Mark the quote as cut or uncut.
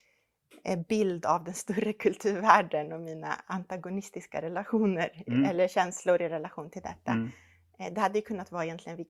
uncut